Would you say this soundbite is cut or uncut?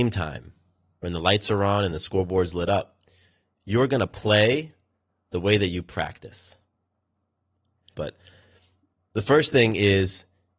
cut